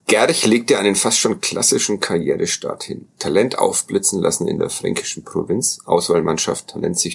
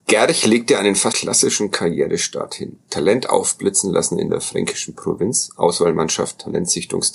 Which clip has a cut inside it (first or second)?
second